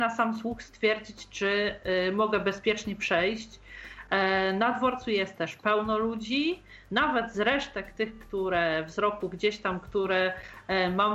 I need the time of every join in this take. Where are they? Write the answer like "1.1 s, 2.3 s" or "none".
none

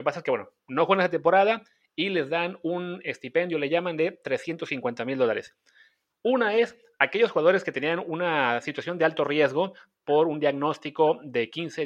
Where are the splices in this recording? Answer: 6.1 s

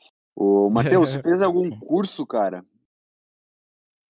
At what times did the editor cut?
none

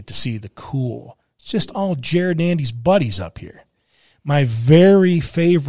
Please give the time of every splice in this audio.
none

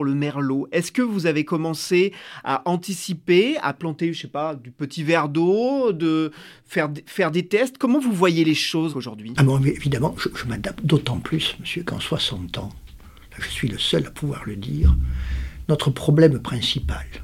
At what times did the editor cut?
8.9 s, 10.2 s, 15.6 s

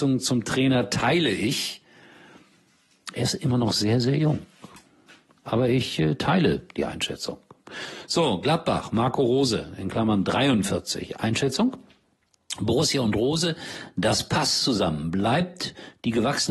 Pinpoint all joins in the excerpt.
none

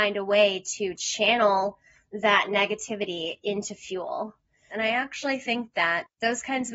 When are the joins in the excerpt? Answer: 4.7 s

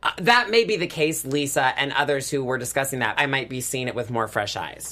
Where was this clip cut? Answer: 3.1 s

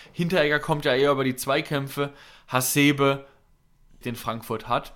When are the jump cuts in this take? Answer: 4.0 s

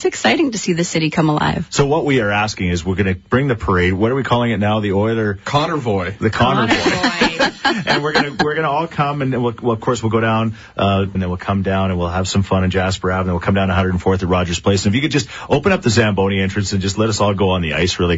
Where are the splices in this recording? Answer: 11.1 s

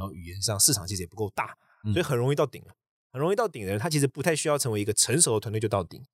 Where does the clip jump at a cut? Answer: none

